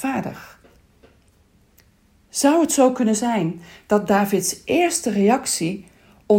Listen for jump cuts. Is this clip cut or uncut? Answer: uncut